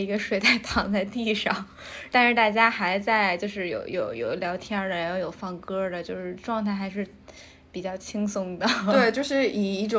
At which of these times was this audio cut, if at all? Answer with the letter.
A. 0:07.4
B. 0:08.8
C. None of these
C